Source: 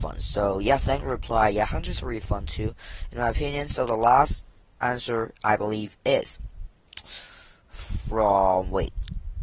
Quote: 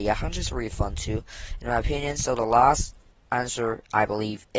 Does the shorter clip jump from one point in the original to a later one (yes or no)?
no